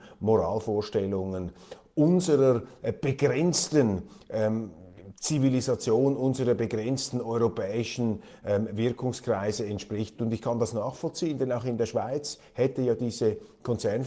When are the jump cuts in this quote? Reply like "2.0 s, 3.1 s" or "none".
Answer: 10.2 s